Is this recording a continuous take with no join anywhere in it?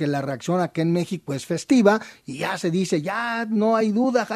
yes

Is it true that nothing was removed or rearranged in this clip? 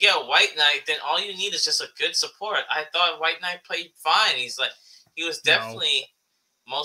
yes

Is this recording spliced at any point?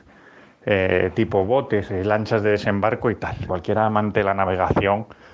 yes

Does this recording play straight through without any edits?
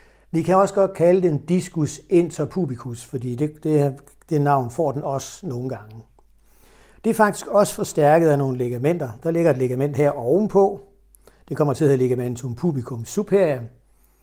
yes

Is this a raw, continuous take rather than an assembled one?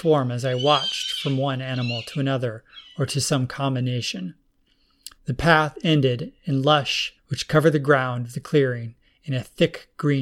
no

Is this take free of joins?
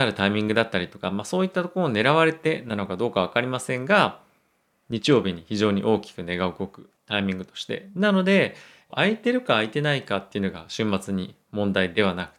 no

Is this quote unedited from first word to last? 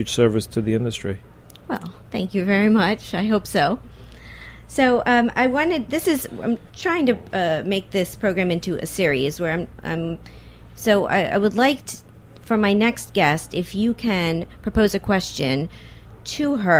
yes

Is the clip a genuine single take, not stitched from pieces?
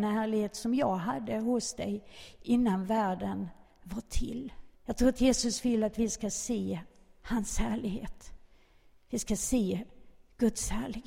no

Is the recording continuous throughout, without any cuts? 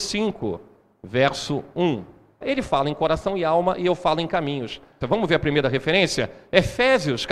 no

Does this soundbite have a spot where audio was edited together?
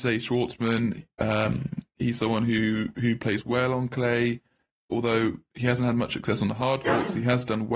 no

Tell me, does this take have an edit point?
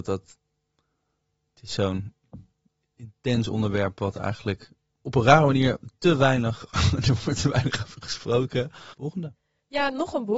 yes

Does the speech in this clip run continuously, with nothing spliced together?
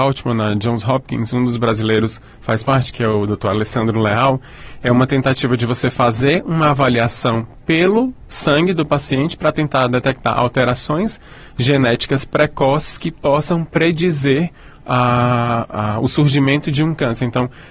yes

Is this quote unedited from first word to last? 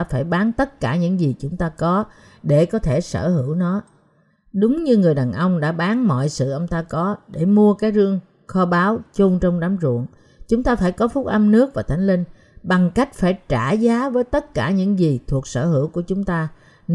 yes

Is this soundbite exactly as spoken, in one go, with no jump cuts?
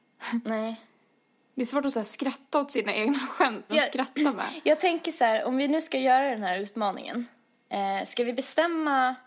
no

